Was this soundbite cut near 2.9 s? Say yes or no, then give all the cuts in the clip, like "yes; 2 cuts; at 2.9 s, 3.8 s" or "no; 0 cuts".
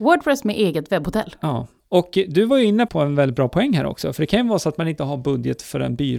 yes; 1 cut; at 2.9 s